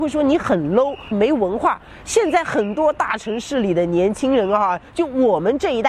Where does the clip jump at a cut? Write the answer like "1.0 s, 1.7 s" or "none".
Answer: 1.1 s